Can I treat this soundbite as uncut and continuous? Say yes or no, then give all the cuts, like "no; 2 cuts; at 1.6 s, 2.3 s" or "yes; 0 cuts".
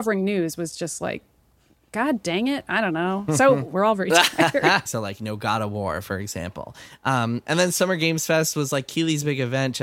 no; 2 cuts; at 3.7 s, 4.9 s